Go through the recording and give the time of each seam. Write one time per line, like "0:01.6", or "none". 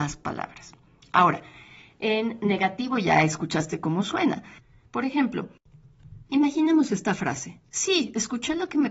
0:04.9
0:06.3